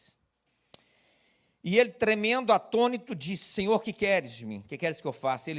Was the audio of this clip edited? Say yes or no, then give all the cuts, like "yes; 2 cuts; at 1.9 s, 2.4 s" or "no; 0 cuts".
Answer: no; 0 cuts